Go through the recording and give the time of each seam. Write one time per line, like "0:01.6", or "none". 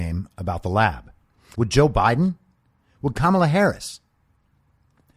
0:01.5

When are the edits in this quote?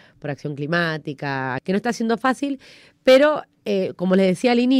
0:01.6

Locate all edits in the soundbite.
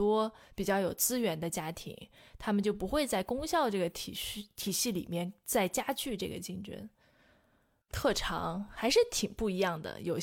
0:07.9

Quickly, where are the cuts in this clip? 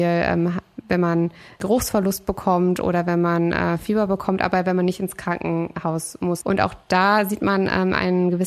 0:06.4

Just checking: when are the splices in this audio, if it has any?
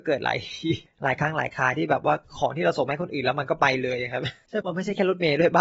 0:04.6

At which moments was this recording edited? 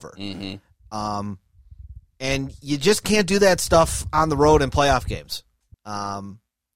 0:05.7

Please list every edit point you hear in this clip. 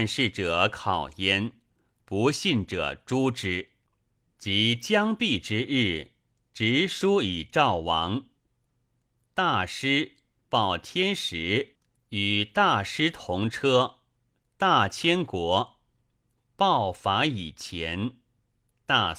0:04.4

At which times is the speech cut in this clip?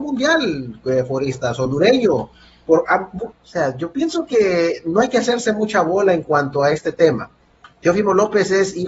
0:03.3

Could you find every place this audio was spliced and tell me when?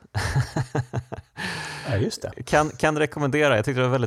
none

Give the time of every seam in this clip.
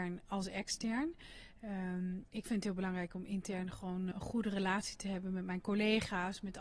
0:04.1

